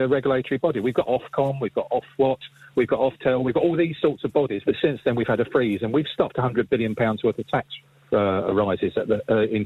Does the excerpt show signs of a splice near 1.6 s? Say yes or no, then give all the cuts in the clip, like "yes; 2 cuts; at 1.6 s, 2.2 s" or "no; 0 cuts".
no; 1 cut; at 4.6 s